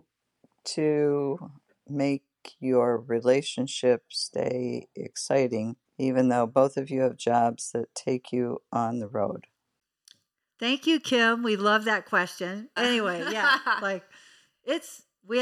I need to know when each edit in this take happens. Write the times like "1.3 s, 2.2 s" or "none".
5.9 s, 12.8 s